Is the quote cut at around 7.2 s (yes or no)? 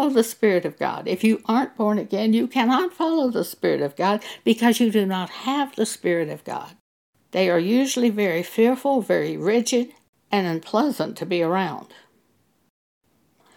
yes